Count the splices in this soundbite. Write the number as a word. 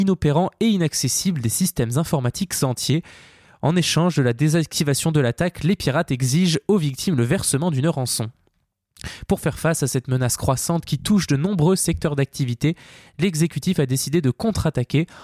zero